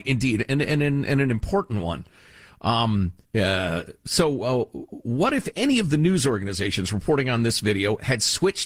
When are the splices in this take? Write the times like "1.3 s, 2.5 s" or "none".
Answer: 3.2 s